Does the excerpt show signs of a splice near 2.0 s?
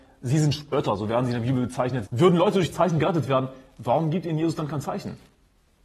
yes; 1 cut; at 2.0 s

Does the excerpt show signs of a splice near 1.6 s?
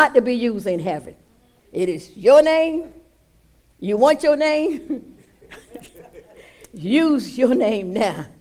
yes; 1 cut; at 1.6 s

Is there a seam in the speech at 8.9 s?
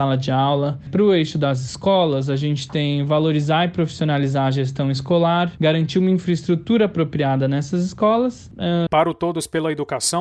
yes; 1 cut; at 8.9 s

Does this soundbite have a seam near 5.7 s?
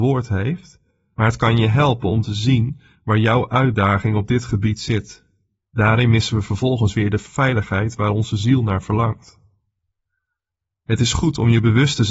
yes; 1 cut; at 5.7 s

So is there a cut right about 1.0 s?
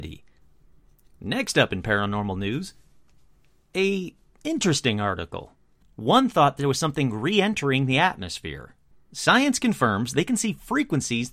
no; 2 cuts; at 5.8 s, 8.9 s

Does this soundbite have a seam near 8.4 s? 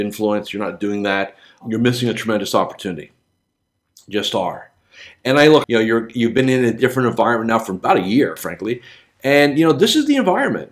yes; 2 cuts; at 5.6 s, 8.4 s

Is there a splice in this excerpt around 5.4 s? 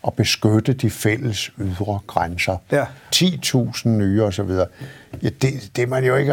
no; 1 cut; at 3.1 s

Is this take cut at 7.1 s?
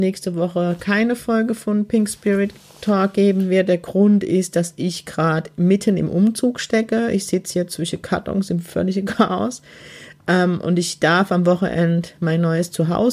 no; 0 cuts

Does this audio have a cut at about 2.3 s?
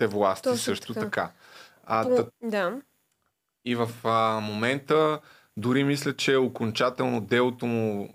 yes; 1 cut; at 2.3 s

